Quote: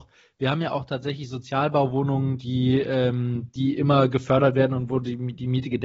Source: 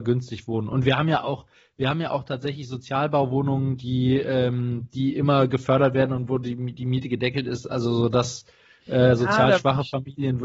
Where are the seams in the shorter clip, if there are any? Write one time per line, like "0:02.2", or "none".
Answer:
none

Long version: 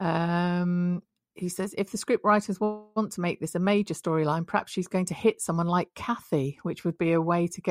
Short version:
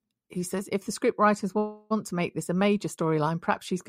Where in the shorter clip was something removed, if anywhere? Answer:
none

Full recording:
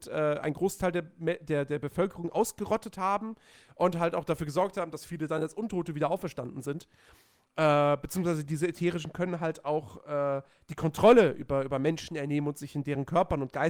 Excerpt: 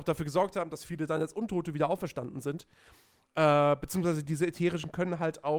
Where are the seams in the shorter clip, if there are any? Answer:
none

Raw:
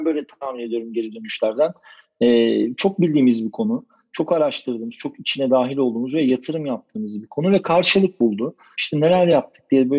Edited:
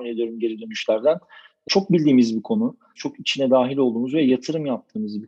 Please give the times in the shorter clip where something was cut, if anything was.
0:01.7
0:03.0

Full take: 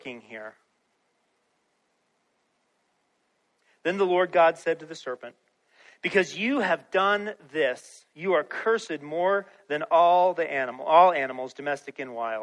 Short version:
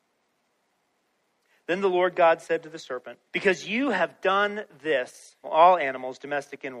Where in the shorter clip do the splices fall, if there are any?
0:03.3
0:05.4

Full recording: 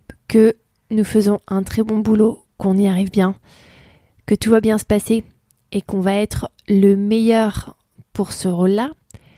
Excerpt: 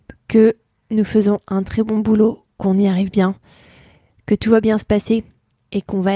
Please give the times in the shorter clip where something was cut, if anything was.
none

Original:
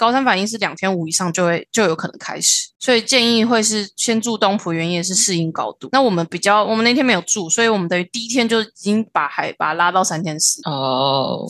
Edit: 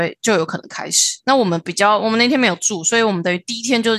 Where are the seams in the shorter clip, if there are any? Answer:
0:01.2

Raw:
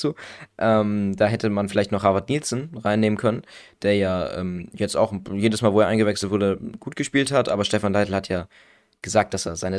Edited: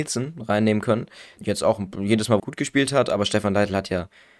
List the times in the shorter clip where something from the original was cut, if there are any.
0:01.4
0:02.4

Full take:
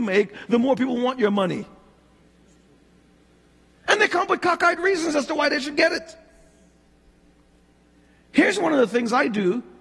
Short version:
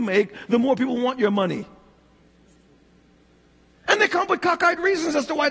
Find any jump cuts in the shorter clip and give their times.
none

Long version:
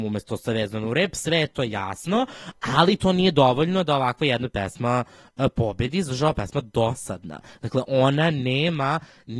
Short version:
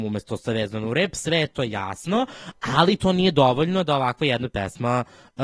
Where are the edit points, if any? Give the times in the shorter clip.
none

